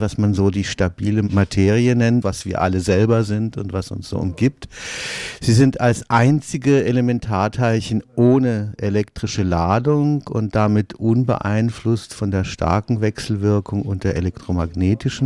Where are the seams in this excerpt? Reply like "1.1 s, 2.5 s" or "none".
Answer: 2.2 s